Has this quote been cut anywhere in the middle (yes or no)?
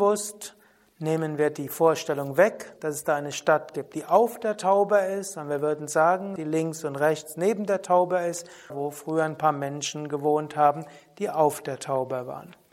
yes